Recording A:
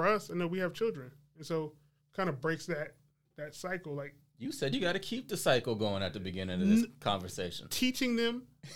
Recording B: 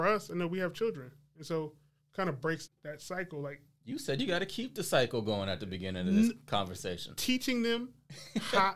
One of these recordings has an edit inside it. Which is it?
B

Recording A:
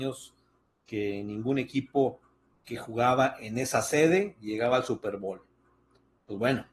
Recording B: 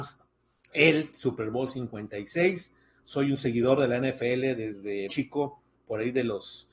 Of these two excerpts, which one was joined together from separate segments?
B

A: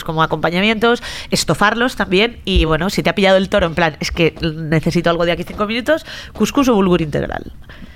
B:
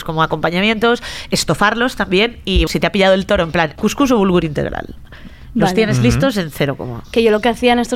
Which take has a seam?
B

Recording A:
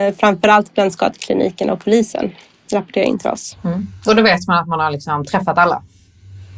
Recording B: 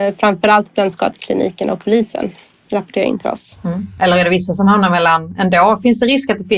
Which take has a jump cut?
B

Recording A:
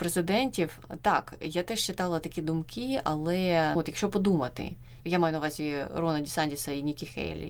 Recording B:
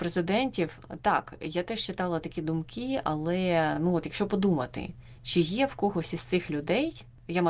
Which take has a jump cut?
A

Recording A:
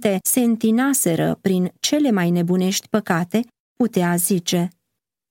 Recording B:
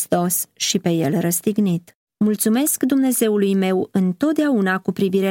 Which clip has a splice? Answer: B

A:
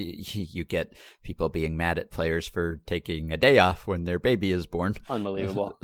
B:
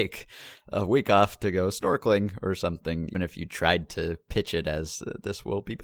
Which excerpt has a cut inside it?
B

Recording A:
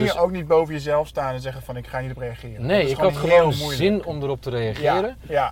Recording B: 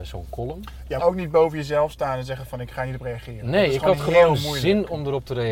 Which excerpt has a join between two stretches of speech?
B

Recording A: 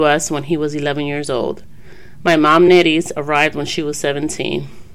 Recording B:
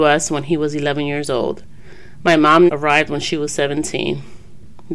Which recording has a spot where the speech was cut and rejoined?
B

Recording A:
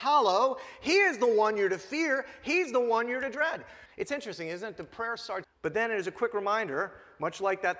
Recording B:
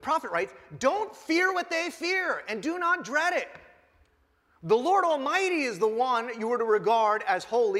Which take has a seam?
A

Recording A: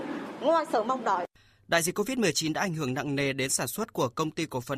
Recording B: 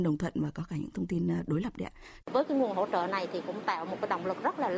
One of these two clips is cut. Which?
B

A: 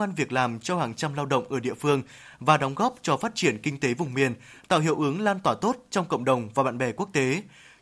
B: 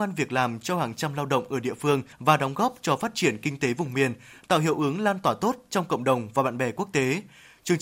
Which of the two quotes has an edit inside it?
B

